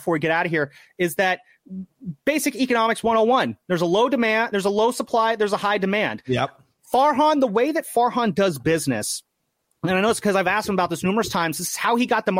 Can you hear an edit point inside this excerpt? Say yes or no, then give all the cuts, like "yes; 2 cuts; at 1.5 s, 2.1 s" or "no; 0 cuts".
no; 0 cuts